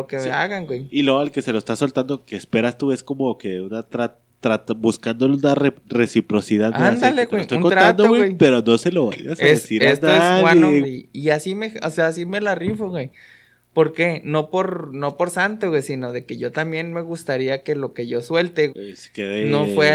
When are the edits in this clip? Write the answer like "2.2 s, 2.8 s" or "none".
10.8 s, 18.7 s